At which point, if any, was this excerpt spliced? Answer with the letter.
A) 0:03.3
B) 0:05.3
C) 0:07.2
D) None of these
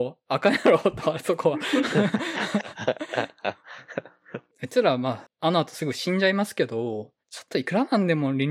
C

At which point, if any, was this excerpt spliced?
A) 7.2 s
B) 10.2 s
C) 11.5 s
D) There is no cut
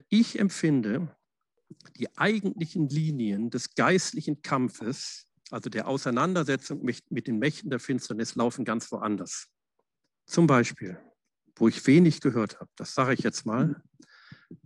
B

